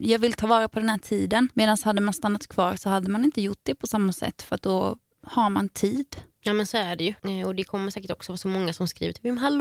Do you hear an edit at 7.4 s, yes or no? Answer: no